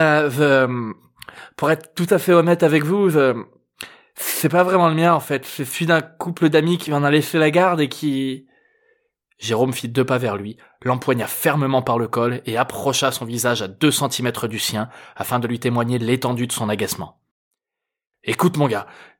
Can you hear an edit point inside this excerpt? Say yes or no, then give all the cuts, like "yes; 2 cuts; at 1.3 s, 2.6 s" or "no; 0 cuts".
no; 0 cuts